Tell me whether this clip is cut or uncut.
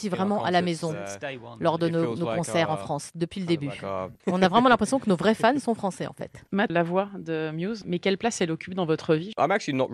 cut